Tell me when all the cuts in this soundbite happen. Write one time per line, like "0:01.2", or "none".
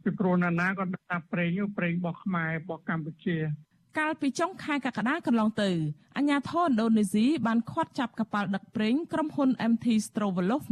none